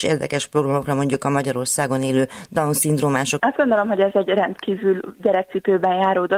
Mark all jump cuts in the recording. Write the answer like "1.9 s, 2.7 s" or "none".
3.4 s